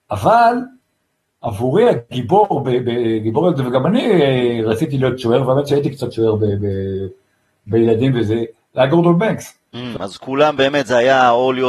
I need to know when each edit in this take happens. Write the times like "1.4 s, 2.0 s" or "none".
10.0 s